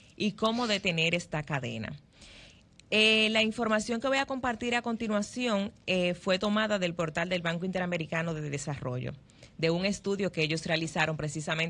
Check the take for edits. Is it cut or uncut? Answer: uncut